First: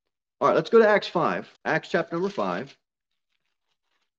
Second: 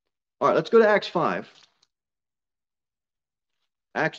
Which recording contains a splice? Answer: first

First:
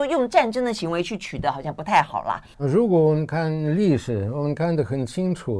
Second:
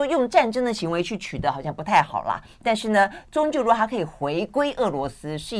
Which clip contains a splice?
first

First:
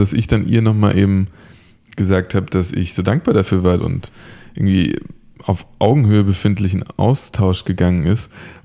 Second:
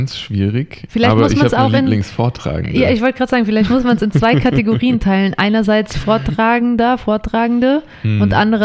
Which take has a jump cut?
first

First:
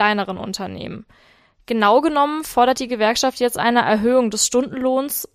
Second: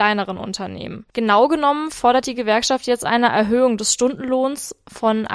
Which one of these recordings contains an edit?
second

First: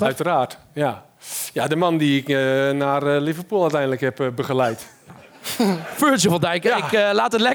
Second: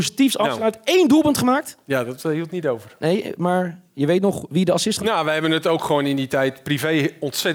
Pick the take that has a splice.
second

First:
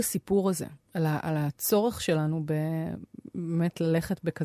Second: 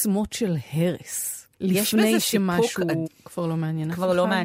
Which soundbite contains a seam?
second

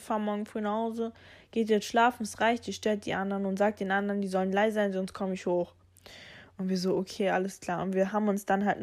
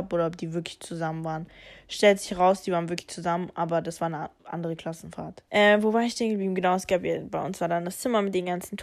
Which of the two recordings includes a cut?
second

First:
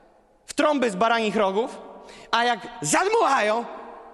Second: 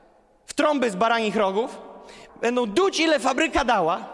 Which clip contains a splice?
second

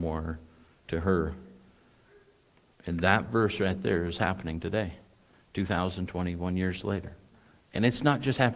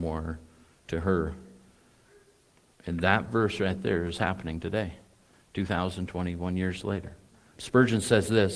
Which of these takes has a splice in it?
second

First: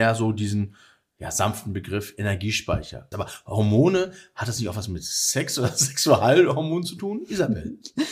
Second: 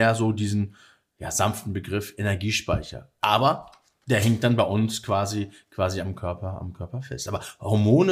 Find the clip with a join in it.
first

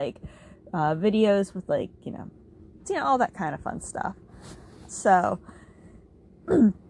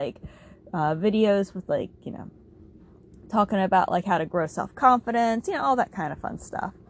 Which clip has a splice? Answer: first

